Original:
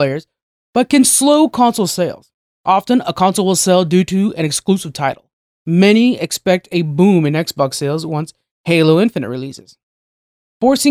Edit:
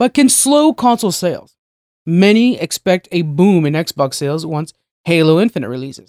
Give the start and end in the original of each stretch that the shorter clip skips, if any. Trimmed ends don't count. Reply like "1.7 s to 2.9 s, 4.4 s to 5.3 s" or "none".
2.6 s to 5.4 s